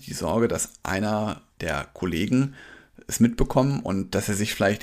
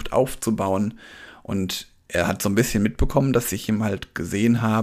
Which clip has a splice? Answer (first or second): first